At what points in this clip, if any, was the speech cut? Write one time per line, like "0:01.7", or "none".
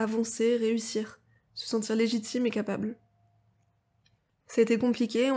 0:04.4